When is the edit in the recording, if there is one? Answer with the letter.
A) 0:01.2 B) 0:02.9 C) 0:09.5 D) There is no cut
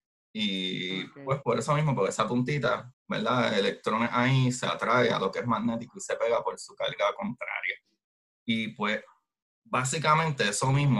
B